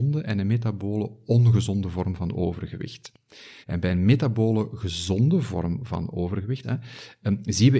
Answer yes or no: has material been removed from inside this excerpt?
yes